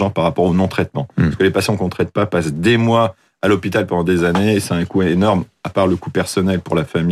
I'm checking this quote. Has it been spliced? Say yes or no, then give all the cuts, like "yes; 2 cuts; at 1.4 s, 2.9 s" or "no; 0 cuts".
no; 0 cuts